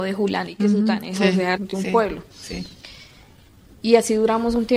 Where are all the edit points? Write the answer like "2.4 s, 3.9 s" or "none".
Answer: 1.6 s